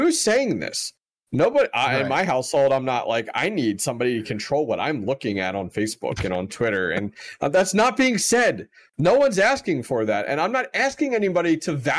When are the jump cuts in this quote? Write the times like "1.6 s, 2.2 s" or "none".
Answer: none

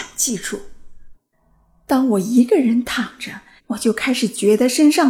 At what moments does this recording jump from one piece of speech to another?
1.1 s, 3.6 s

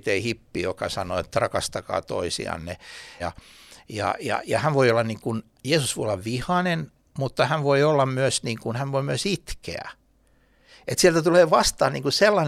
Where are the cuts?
3.2 s

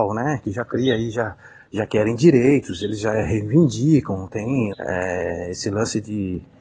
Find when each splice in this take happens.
4.7 s

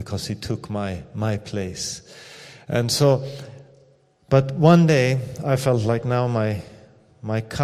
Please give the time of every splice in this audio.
none

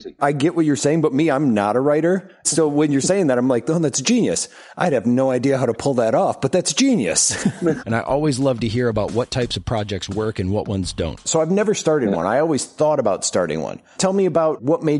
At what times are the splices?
7.8 s, 11.2 s

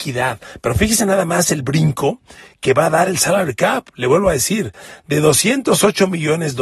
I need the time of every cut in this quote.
none

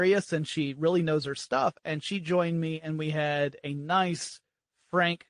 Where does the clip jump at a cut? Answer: none

